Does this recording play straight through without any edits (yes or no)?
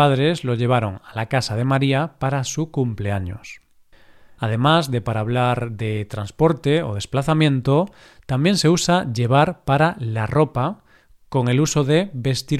yes